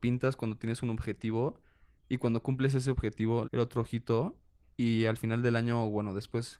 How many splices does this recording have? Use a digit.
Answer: 1